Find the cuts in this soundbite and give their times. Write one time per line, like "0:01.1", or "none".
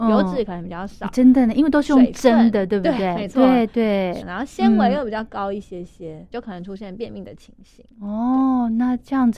0:04.2
0:06.3

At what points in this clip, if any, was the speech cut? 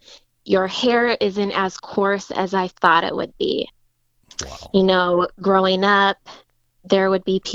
0:04.2

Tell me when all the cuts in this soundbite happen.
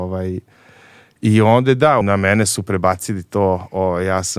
0:02.0

